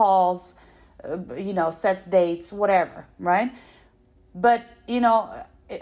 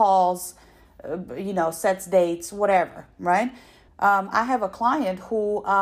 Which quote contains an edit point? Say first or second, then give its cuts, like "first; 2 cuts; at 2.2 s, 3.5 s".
second; 1 cut; at 3.9 s